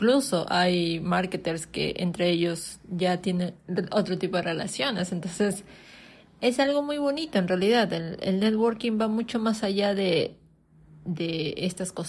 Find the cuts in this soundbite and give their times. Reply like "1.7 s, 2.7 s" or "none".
none